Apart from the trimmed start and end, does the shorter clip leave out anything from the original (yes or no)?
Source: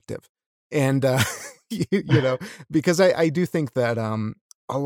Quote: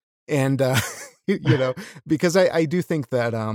yes